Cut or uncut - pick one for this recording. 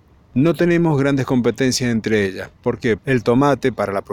cut